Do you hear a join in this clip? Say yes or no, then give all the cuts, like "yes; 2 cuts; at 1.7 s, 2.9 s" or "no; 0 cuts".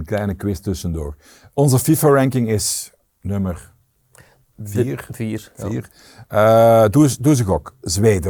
no; 0 cuts